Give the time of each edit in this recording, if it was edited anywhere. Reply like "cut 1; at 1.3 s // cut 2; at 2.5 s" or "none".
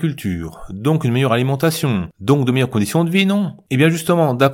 none